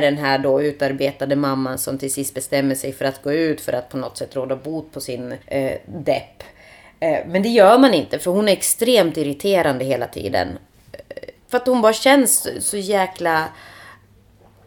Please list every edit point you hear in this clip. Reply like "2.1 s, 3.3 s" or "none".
5.4 s, 11.4 s